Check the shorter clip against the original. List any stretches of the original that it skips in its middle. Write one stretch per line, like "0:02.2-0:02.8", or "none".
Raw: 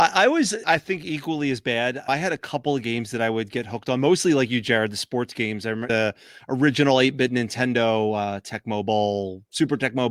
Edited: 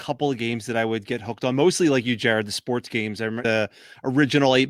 none